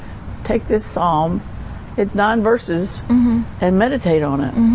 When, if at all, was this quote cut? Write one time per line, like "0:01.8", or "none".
0:02.1